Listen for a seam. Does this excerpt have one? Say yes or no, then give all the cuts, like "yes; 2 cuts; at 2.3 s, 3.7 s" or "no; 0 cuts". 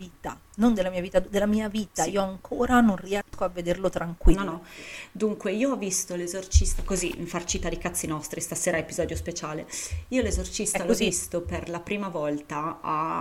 no; 0 cuts